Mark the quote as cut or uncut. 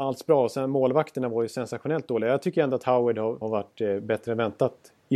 cut